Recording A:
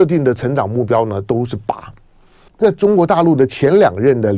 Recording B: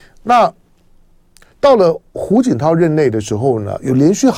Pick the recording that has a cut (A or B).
A